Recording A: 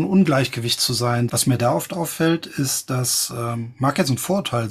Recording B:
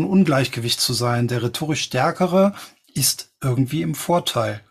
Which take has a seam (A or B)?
A